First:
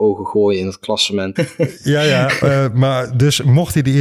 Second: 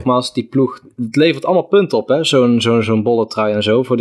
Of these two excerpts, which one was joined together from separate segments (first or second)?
first